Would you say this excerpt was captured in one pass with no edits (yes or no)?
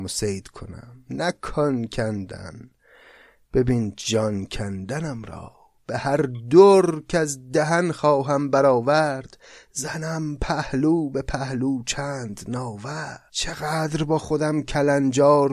no